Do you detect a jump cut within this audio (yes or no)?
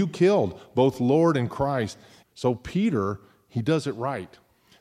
yes